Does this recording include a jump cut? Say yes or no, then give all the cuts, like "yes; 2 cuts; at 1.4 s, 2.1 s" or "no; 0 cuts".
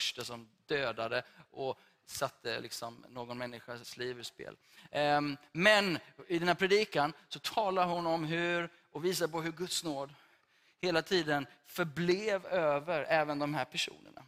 no; 0 cuts